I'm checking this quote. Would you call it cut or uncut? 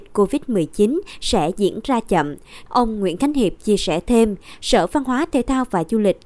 cut